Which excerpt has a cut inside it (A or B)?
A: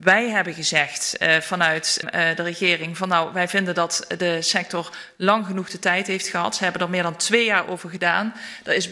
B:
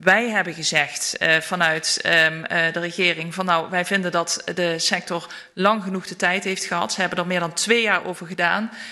A